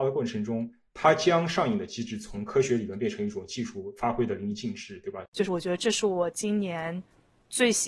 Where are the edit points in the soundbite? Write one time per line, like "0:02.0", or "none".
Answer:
0:05.3